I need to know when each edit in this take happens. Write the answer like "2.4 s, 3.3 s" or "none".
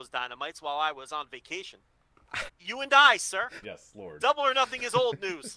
2.5 s, 3.6 s

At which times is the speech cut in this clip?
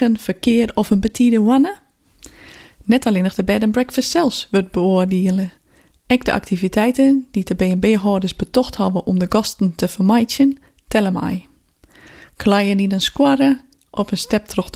none

